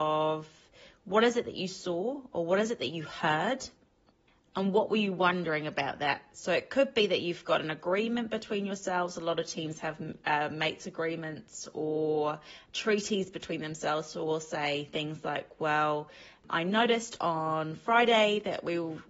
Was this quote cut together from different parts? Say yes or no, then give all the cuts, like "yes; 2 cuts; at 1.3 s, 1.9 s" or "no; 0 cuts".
no; 0 cuts